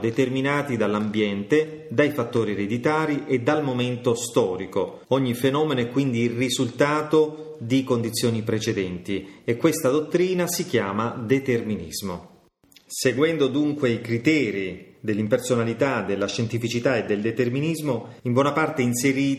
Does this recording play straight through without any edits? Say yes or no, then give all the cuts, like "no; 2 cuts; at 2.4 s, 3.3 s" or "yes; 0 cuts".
no; 2 cuts; at 5.0 s, 18.2 s